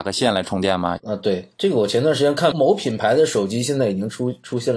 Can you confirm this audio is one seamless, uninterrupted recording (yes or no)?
no